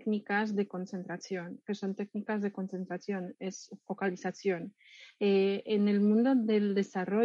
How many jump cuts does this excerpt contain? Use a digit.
0